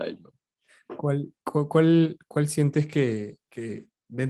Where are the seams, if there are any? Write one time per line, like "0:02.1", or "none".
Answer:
none